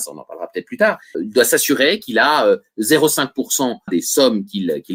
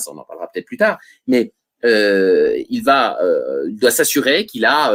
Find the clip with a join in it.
first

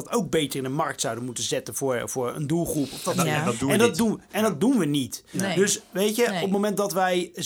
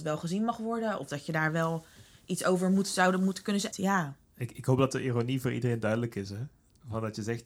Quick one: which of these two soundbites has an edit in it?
second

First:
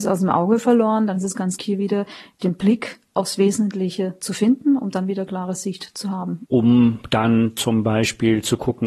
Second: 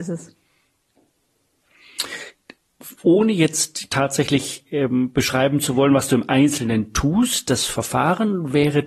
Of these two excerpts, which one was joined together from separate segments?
first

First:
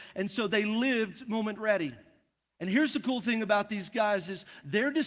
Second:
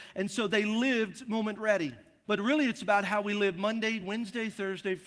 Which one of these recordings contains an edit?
second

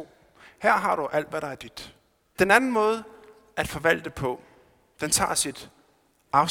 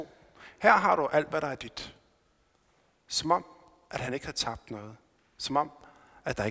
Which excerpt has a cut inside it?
first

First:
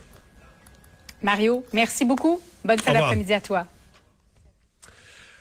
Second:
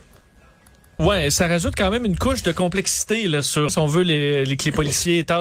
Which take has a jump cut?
second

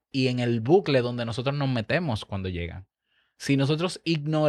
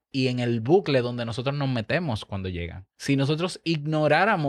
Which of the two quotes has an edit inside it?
second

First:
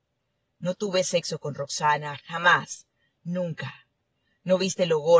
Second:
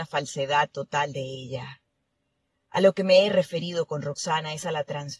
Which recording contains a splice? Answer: first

